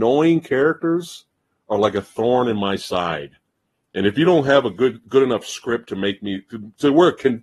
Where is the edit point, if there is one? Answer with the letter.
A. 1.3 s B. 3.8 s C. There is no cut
C